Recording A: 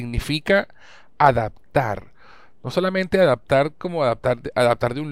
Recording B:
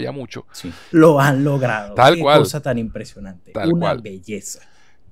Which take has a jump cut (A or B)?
B